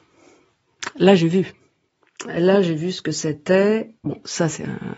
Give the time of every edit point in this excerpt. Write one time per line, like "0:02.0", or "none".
0:04.0